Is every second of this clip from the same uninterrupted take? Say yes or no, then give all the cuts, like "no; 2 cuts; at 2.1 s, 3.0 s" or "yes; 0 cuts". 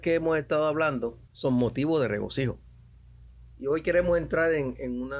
no; 2 cuts; at 1.3 s, 3.5 s